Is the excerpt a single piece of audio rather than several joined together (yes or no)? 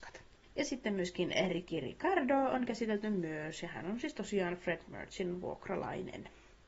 yes